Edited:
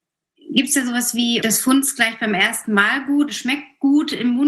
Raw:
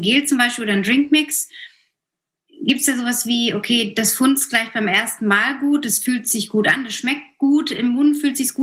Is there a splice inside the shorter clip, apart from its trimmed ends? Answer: yes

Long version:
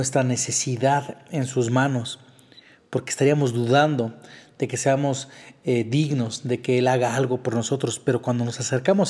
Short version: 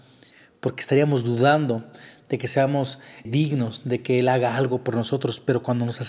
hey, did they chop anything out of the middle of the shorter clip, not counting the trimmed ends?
yes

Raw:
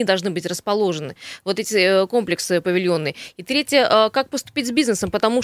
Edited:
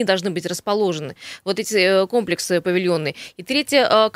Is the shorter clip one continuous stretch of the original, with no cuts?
yes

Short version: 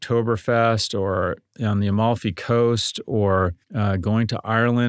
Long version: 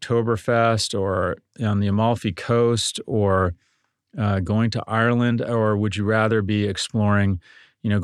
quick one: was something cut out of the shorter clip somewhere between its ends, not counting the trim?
yes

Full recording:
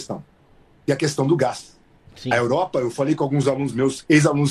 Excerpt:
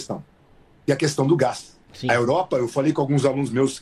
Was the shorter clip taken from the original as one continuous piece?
no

